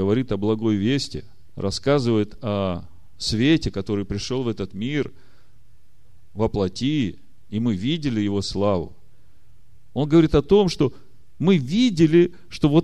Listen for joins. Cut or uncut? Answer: uncut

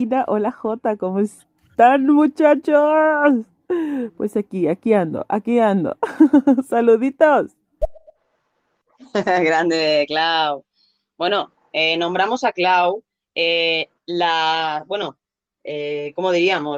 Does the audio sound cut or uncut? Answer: uncut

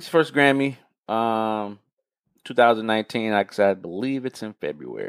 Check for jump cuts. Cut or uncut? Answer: uncut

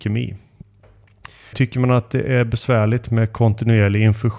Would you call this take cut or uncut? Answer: cut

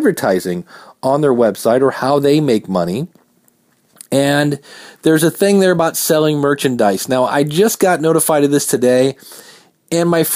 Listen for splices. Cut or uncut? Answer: uncut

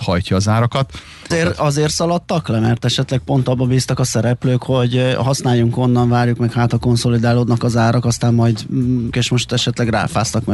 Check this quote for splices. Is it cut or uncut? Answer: cut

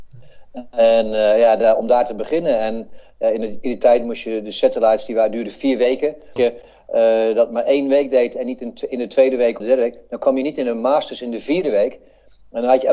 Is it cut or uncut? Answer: cut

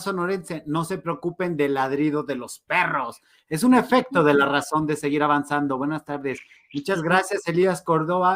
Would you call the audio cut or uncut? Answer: uncut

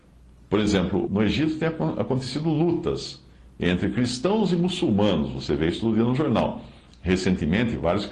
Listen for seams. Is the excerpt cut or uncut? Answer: cut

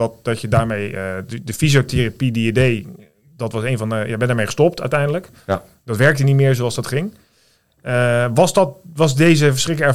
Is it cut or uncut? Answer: uncut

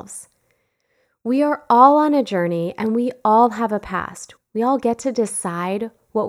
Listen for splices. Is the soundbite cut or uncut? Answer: cut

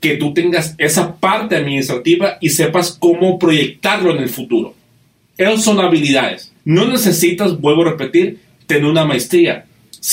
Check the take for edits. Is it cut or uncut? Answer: cut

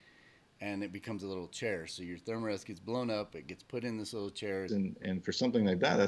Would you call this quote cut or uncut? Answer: cut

